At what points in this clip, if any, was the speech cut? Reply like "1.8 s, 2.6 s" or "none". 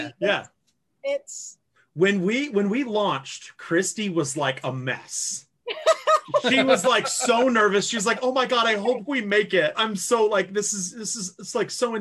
9.7 s